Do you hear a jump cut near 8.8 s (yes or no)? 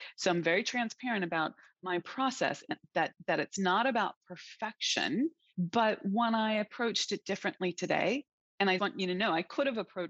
yes